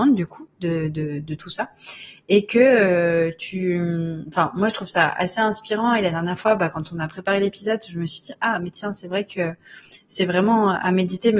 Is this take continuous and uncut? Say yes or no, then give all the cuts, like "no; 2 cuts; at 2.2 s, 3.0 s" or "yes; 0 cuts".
yes; 0 cuts